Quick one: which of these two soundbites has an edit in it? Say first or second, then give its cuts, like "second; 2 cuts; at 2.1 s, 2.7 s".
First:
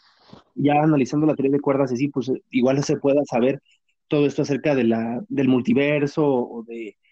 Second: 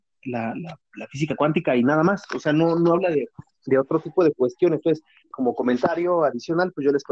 second; 1 cut; at 5.3 s